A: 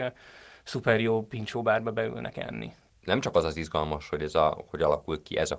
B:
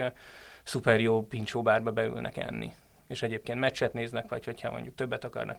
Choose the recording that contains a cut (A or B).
A